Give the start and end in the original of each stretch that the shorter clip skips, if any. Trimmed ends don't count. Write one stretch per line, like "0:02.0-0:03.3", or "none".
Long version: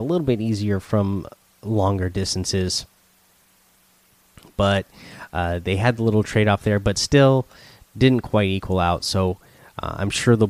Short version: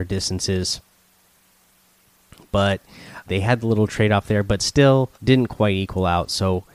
0:05.3-0:05.6
0:07.5-0:07.9